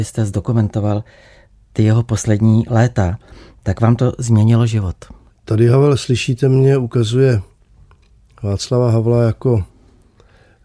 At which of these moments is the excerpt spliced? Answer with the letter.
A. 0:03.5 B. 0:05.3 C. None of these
B